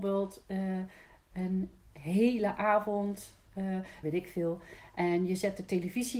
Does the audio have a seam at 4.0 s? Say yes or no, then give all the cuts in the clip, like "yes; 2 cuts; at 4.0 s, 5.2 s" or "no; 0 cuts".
yes; 1 cut; at 4.0 s